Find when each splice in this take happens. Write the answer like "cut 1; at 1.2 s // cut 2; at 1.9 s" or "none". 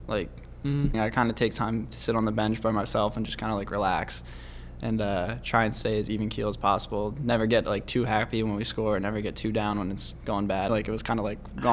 cut 1; at 0.9 s // cut 2; at 10.7 s